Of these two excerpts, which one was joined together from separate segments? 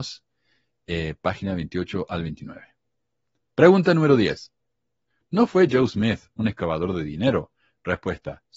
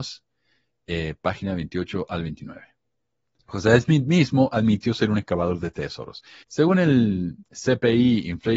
second; 2 cuts; at 3.4 s, 6.4 s

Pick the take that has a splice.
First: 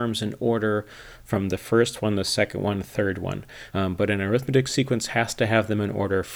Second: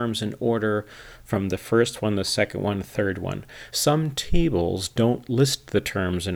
first; 1 cut; at 3.7 s

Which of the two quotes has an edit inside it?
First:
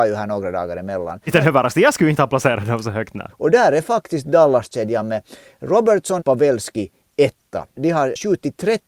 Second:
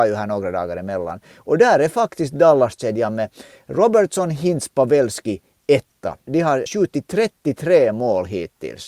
first; 3 cuts; at 1.3 s, 3.3 s, 6.2 s

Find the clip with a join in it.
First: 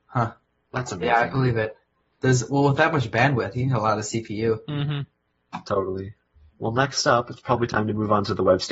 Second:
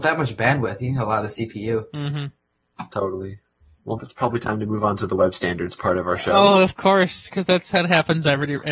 second; 1 cut; at 4.0 s

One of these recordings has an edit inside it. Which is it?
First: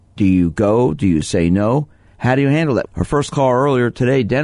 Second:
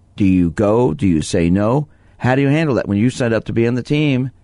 first; 1 cut; at 2.9 s

